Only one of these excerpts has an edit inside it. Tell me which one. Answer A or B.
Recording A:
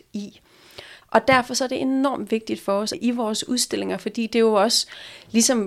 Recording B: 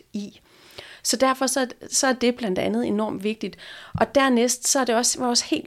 A